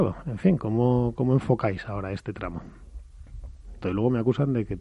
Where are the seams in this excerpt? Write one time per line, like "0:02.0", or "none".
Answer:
0:03.8